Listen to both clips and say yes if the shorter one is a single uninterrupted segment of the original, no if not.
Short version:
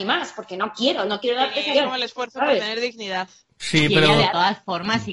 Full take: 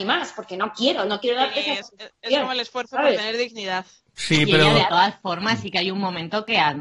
no